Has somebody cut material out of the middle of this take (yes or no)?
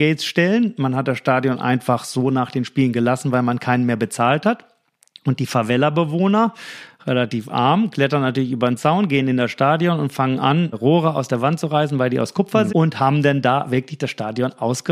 yes